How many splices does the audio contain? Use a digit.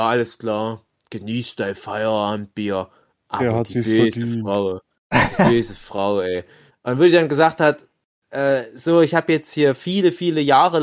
1